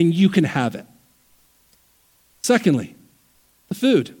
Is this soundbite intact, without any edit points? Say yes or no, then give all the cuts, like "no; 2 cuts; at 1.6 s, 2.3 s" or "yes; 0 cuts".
yes; 0 cuts